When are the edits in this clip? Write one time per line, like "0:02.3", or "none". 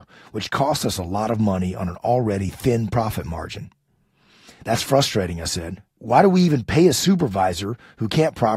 none